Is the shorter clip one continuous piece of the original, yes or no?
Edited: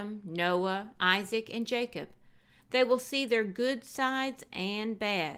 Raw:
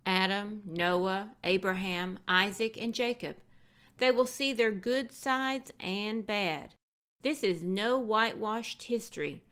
no